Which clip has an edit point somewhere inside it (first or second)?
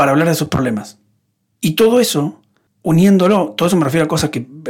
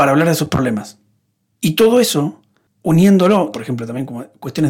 second